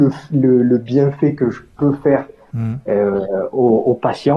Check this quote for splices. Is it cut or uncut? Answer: uncut